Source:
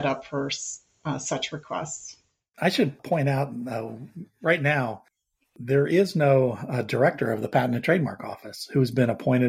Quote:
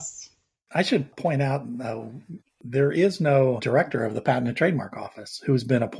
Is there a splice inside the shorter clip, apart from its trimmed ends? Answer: yes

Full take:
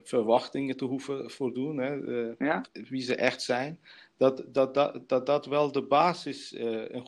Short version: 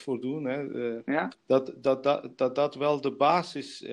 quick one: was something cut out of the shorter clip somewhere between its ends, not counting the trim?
yes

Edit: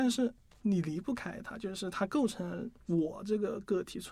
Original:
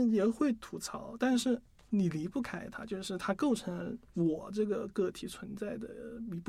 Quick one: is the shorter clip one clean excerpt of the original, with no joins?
yes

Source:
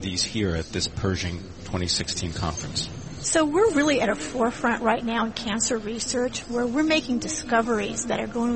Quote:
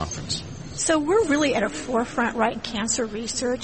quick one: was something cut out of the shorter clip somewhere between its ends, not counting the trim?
yes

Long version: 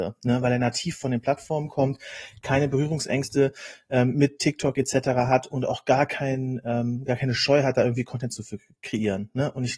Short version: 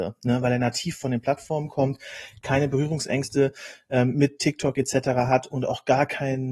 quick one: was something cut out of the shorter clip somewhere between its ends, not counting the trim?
no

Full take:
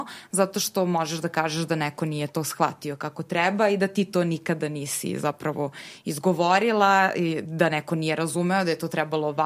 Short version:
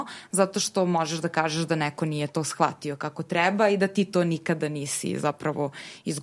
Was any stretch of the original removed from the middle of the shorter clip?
no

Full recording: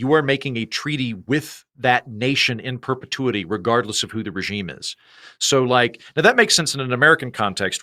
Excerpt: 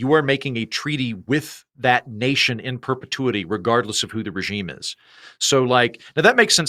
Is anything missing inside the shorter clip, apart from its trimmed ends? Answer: no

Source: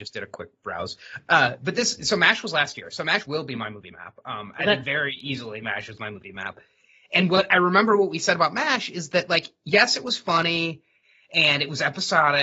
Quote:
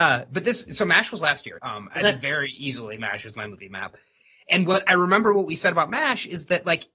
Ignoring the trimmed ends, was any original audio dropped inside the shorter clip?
yes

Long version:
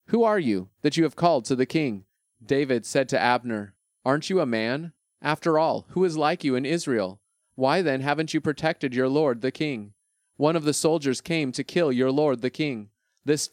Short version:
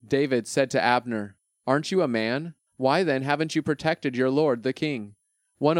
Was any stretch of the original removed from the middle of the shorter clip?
yes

